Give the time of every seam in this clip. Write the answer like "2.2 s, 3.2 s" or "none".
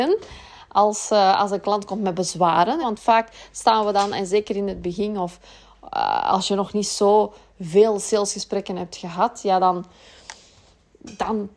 2.8 s